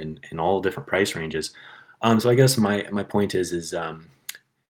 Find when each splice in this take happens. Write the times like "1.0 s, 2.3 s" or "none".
none